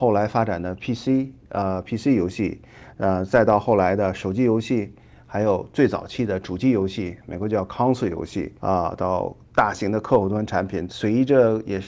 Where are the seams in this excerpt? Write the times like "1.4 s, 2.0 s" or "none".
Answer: 8.6 s, 10.9 s